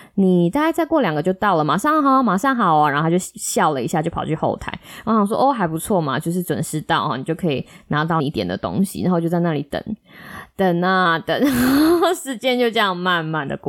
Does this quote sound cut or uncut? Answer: uncut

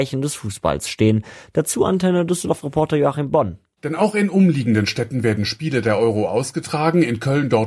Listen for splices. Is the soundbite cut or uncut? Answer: uncut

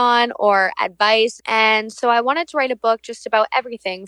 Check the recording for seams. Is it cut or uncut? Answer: cut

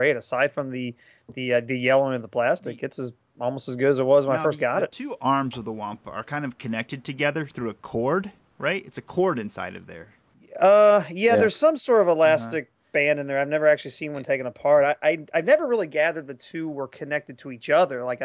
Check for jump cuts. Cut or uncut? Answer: uncut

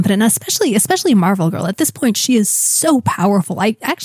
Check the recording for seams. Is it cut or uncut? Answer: uncut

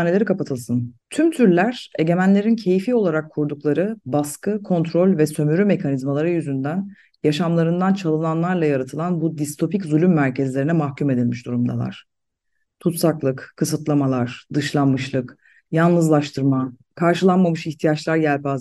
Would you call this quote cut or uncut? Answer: cut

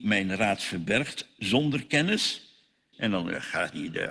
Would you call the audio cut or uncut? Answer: cut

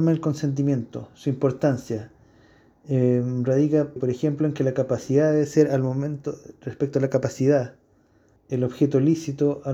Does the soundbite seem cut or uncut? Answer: cut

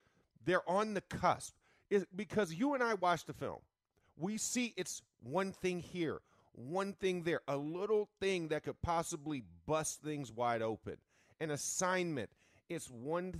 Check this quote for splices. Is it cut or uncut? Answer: uncut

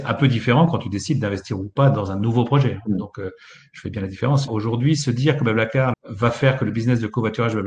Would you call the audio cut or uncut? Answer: cut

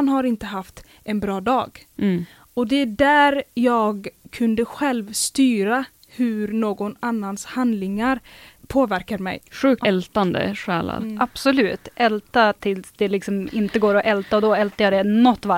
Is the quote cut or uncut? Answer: cut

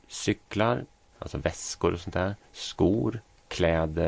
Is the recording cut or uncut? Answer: cut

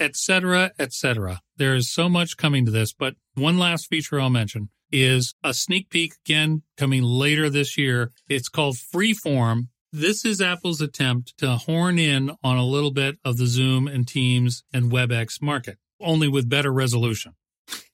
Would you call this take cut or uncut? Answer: uncut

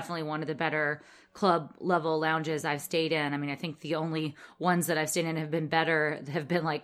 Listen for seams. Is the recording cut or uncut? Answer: uncut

